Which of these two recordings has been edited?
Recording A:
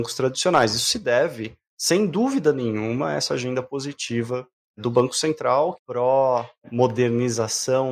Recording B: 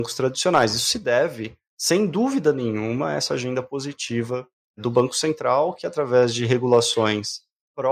A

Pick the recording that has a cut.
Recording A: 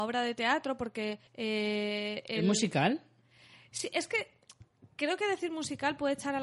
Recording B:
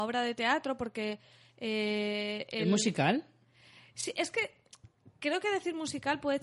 A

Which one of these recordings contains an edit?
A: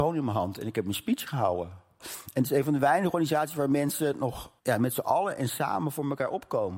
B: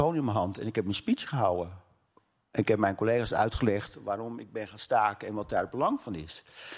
A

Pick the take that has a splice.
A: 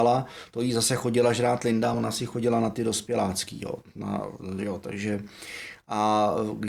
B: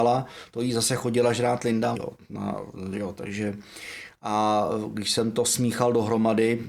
B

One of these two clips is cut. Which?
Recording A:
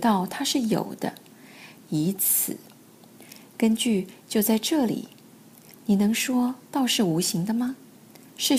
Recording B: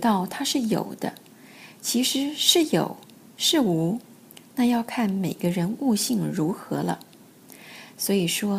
A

